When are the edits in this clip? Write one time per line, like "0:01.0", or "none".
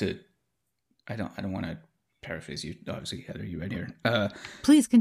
none